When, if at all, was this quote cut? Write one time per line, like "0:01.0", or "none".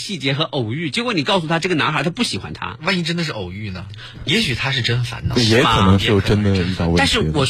0:04.2